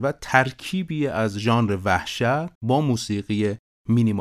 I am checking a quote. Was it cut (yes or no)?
yes